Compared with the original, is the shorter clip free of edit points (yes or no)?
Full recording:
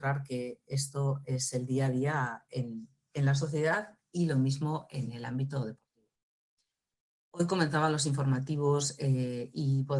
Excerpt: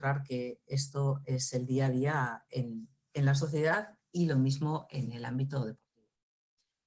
yes